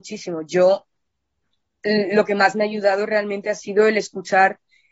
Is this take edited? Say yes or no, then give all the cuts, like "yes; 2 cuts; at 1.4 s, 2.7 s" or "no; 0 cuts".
no; 0 cuts